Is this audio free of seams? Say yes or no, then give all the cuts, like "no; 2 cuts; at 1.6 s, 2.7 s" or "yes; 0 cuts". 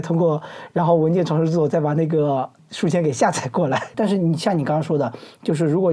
no; 1 cut; at 3.9 s